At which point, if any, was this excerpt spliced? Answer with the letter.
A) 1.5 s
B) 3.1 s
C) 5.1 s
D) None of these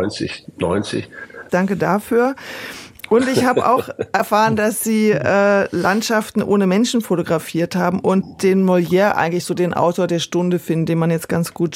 A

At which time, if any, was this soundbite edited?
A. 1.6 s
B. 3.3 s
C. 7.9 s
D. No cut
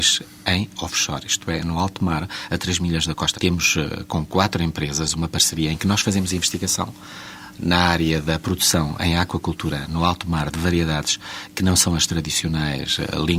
B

